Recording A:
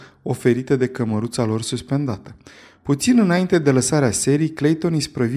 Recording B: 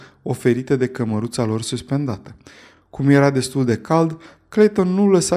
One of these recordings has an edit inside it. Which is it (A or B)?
A